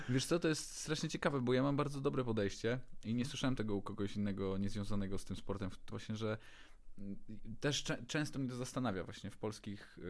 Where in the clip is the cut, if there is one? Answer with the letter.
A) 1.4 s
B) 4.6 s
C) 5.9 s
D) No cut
C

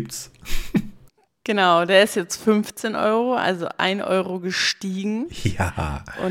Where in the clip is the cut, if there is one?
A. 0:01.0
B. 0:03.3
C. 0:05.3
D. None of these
D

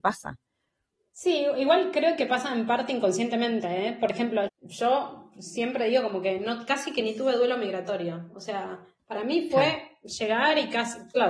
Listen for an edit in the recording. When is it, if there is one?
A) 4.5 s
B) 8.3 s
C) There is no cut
A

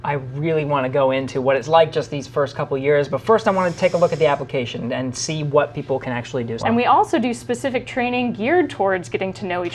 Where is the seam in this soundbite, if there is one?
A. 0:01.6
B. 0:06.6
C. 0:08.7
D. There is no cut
B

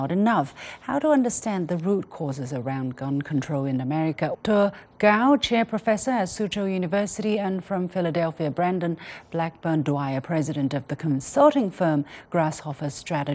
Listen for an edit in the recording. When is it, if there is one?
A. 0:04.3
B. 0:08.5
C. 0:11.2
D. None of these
A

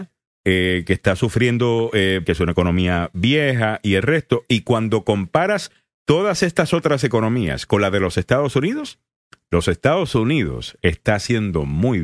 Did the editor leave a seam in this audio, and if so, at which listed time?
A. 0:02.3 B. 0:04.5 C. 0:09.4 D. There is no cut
A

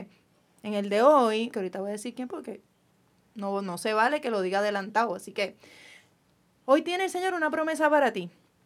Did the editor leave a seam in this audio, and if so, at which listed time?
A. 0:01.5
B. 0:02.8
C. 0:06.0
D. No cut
A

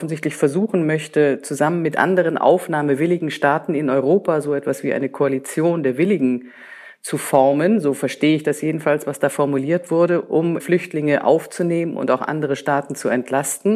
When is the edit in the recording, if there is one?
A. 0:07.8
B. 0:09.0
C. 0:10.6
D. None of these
C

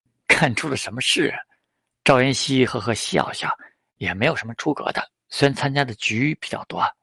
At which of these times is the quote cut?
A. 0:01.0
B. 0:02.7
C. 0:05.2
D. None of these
D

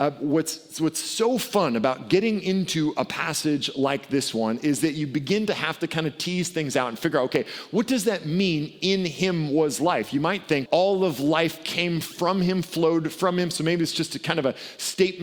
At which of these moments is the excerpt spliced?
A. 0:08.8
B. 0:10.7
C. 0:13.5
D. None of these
B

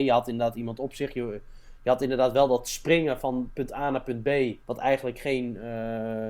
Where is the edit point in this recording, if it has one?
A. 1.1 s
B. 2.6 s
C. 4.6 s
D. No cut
C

